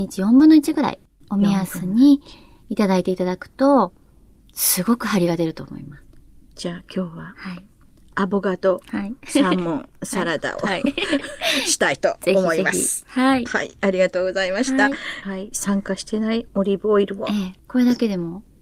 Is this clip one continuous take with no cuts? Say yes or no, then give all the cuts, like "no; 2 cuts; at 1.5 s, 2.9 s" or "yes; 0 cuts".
no; 1 cut; at 15.2 s